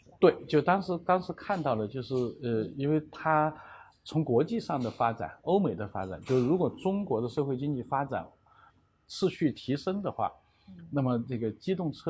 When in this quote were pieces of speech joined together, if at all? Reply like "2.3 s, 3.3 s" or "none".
none